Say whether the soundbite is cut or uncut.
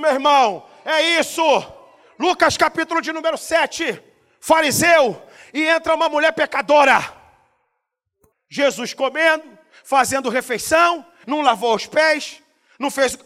cut